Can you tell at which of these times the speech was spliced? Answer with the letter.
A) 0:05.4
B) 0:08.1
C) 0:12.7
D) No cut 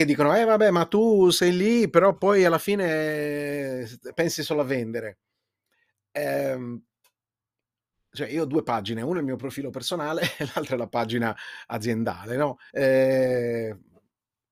C